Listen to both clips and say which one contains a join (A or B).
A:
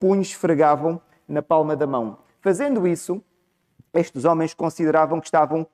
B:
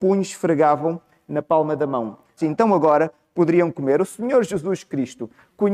B